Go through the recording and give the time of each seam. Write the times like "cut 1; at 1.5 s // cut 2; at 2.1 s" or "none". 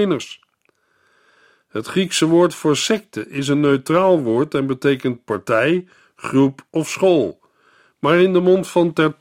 none